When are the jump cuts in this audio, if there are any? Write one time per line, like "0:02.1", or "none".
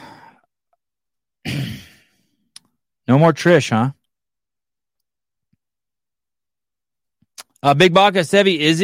none